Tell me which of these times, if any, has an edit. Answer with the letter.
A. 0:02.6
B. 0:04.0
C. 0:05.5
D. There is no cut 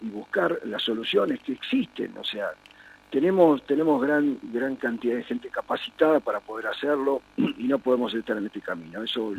D